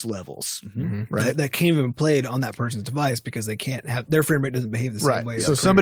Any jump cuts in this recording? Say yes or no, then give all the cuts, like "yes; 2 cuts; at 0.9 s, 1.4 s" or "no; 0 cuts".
no; 0 cuts